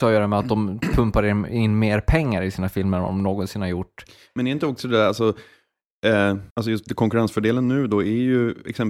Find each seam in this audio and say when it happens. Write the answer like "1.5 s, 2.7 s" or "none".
6.5 s